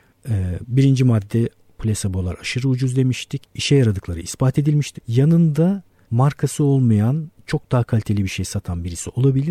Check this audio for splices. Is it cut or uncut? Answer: cut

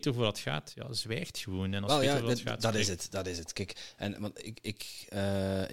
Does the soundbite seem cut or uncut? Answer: uncut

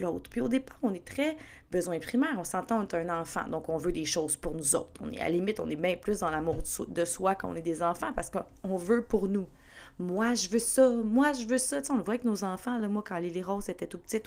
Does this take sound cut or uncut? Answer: uncut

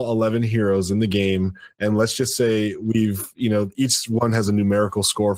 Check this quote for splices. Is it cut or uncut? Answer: uncut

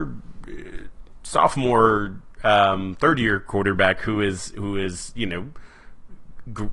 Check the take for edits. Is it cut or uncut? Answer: uncut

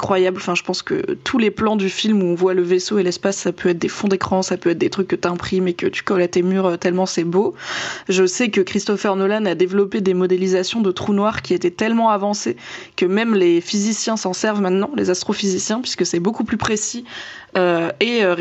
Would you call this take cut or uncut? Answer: uncut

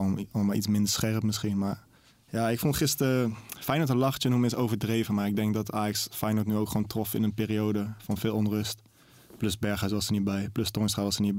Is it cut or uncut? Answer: uncut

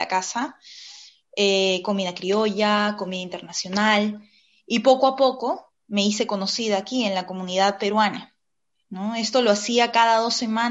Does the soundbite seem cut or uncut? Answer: uncut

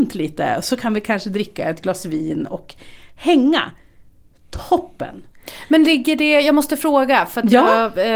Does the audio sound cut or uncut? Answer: uncut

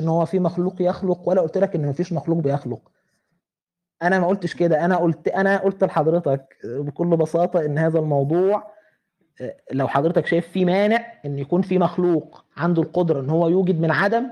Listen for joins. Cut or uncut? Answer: uncut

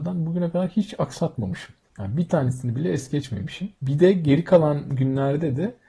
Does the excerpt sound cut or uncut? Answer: cut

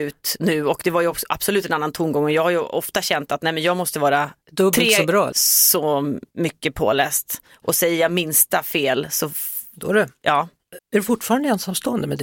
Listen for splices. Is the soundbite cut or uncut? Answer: cut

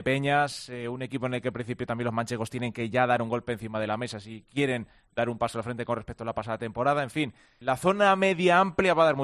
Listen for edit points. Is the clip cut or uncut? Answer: cut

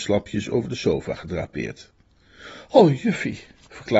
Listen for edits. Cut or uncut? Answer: uncut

